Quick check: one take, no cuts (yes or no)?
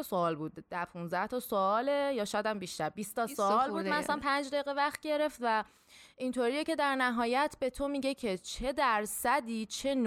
yes